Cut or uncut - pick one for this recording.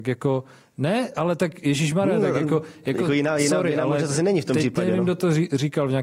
uncut